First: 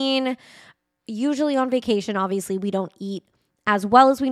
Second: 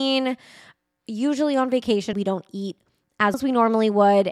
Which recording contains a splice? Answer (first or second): second